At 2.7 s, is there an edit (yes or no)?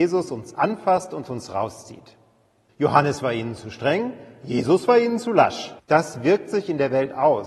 yes